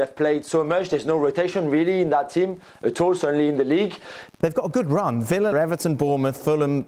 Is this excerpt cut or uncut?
cut